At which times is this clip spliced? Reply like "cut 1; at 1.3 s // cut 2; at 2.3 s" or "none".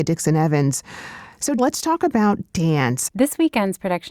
cut 1; at 1.6 s // cut 2; at 3.1 s